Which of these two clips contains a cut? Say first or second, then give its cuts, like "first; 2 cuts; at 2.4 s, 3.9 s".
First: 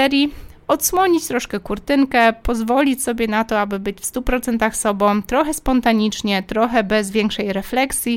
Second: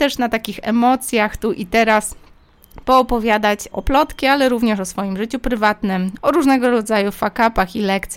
second; 2 cuts; at 3.7 s, 6.2 s